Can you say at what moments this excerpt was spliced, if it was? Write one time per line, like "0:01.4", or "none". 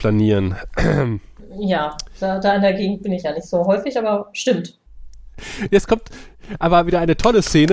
none